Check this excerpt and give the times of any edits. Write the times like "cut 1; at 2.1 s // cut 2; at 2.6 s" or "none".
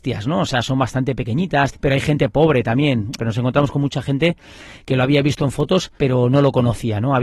cut 1; at 1.7 s // cut 2; at 3.2 s // cut 3; at 6.0 s